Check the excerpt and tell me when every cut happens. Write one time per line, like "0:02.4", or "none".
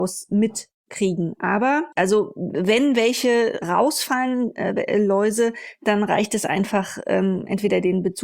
0:01.9